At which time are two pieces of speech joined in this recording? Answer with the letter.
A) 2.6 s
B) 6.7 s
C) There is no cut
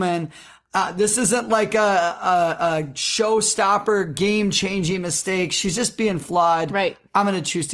C